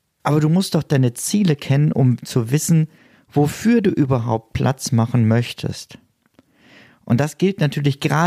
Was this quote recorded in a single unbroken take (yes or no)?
yes